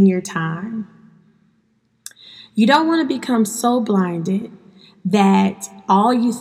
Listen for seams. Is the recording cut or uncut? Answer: uncut